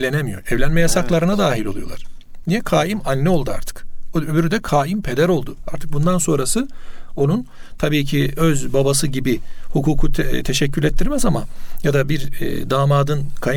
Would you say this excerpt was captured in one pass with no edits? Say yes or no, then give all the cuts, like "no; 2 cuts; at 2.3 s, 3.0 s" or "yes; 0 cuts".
no; 1 cut; at 4.1 s